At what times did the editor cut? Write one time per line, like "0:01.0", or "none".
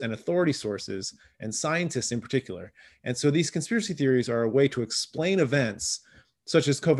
none

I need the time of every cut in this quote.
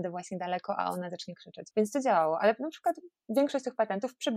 0:01.7

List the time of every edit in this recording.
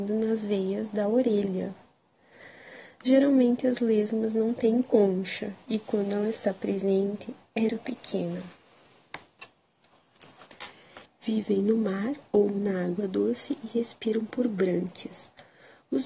0:07.7
0:11.1

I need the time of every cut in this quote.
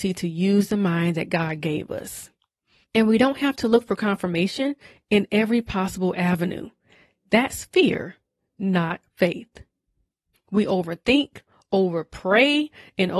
0:02.8
0:10.3

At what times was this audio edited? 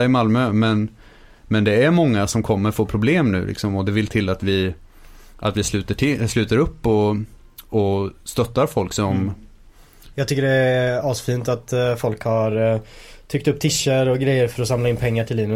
0:10.1

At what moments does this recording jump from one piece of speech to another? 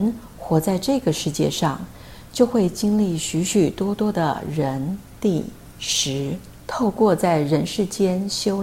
0:06.6

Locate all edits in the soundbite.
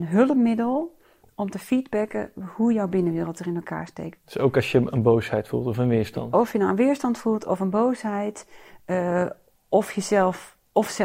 0:04.2

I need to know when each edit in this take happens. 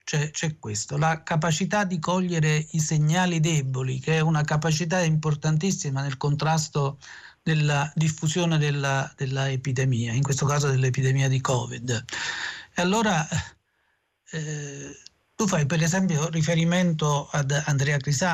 none

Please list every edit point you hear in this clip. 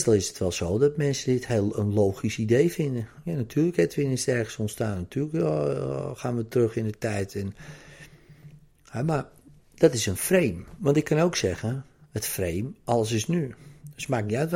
none

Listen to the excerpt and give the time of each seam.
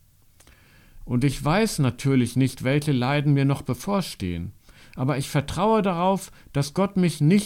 0:01.0

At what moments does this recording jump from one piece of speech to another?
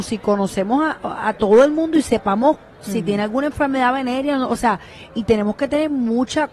none

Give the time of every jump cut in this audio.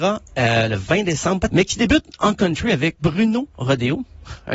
0:01.5
0:03.0

